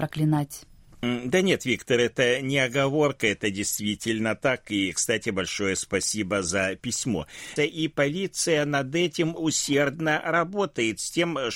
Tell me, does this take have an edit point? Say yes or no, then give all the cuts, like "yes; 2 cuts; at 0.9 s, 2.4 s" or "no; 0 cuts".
yes; 2 cuts; at 7.6 s, 9.4 s